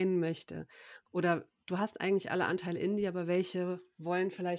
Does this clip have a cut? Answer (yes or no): yes